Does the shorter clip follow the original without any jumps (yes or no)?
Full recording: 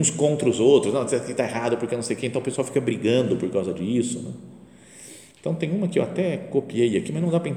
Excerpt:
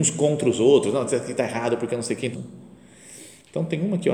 no